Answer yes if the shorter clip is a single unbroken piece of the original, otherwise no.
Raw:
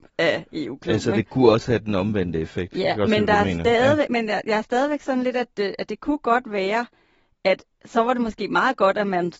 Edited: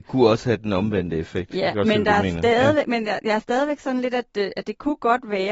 yes